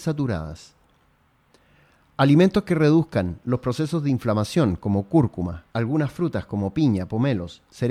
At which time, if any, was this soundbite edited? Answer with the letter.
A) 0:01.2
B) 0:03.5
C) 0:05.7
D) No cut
C